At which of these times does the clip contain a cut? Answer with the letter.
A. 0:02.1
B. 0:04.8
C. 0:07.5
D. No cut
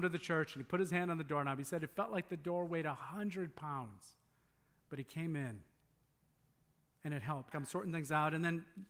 C